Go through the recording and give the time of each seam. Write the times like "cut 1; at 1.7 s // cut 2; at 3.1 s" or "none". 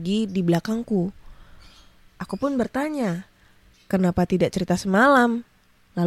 cut 1; at 3.7 s